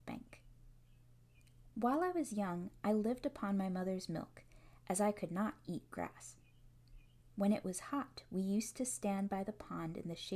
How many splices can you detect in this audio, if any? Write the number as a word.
one